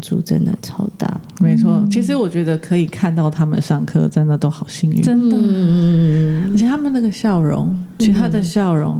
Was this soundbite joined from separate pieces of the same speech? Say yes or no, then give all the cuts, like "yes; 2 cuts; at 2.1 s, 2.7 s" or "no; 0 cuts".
no; 0 cuts